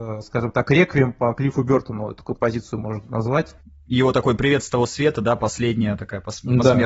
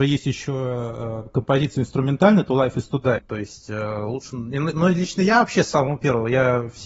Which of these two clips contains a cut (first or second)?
second